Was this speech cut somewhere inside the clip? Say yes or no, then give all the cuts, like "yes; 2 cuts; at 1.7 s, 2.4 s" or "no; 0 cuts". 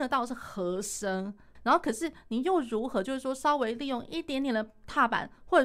yes; 1 cut; at 1.6 s